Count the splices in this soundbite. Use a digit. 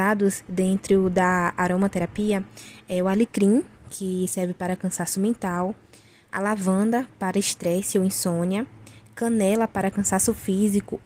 0